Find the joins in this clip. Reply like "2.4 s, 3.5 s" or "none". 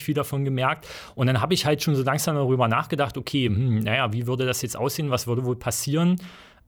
none

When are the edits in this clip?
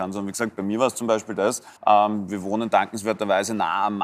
1.8 s

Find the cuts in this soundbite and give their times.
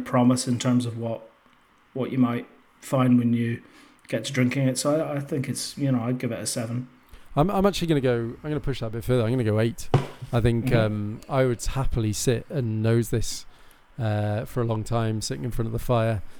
none

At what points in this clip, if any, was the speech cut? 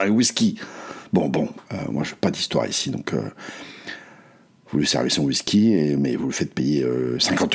none

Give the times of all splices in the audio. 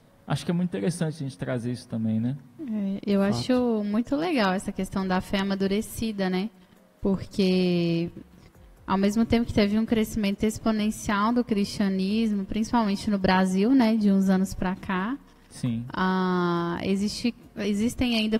none

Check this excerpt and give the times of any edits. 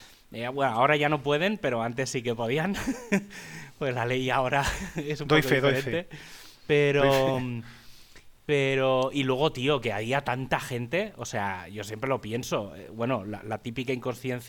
none

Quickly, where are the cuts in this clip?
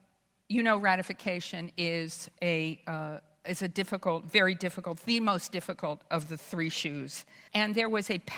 7.5 s

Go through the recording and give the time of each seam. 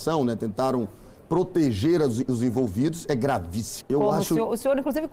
3.8 s

